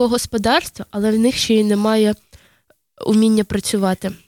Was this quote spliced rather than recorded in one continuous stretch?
no; 0 cuts

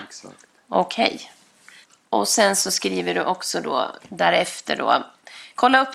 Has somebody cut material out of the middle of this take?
yes; 1 cut; at 4.0 s

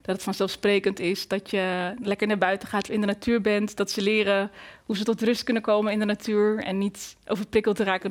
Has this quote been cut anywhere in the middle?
no; 0 cuts

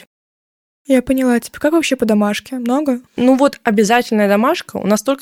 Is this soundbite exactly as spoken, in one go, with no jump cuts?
no; 1 cut; at 3.1 s

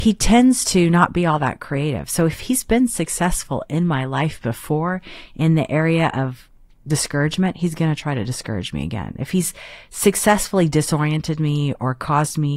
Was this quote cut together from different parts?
no; 0 cuts

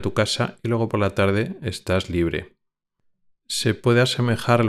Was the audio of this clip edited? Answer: no; 0 cuts

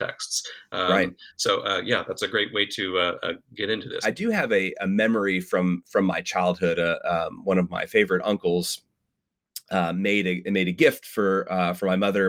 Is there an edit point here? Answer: yes; 1 cut; at 4.0 s

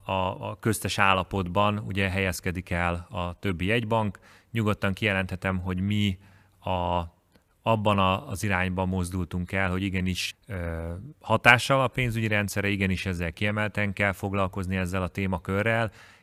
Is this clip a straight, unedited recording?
no; 1 cut; at 10.3 s

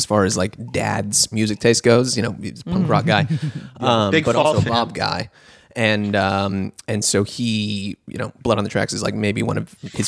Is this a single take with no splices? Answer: yes; 0 cuts

